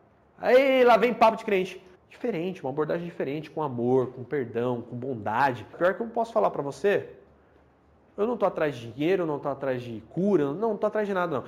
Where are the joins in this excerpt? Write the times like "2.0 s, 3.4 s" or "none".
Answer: 2.0 s, 5.7 s